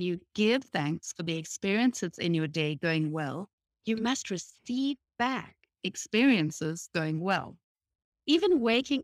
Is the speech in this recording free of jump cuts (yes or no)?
no